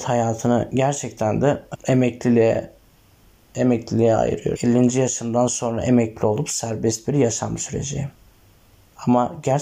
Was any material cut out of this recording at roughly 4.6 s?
yes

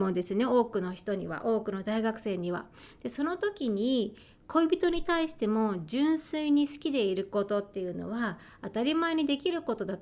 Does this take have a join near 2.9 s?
no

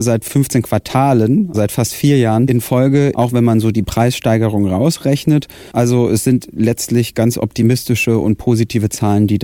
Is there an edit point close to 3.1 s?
yes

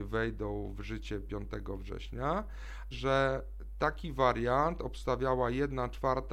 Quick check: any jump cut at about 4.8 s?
no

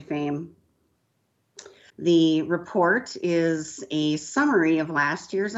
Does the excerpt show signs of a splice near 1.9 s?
yes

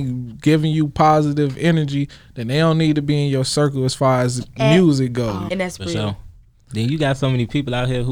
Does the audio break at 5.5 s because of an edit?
yes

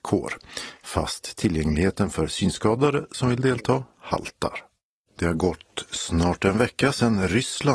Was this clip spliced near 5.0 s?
yes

